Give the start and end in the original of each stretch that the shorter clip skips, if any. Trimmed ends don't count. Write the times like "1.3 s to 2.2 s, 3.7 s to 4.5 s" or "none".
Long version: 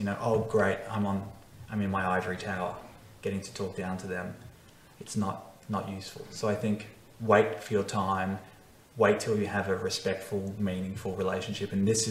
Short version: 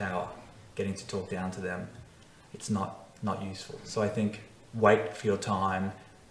none